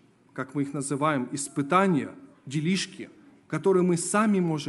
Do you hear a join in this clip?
no; 0 cuts

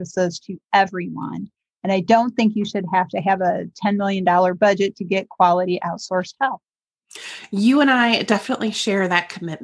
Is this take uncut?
yes; 0 cuts

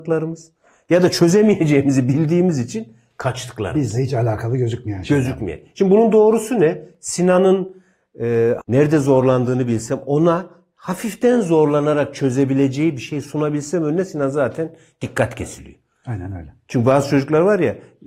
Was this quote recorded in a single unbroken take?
no; 1 cut; at 8.6 s

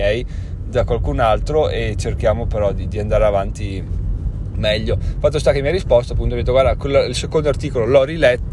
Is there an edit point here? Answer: no; 0 cuts

